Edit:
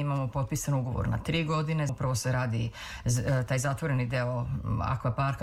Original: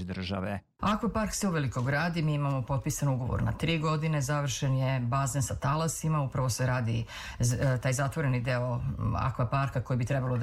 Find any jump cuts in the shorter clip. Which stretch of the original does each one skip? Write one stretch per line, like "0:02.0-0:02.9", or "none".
0:04.2-0:06.2